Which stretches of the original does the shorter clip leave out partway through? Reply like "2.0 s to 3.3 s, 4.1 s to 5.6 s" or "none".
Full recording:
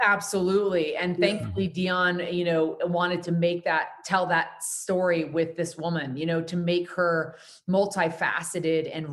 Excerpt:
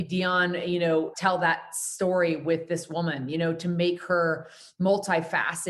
2.8 s to 4.0 s